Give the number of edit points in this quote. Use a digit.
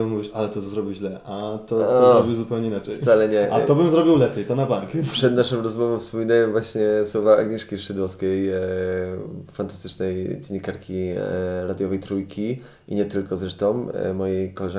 0